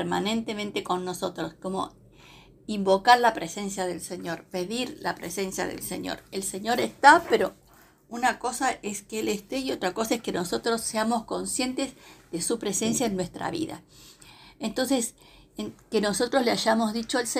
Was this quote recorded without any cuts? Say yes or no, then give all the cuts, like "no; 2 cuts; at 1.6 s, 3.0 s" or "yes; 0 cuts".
yes; 0 cuts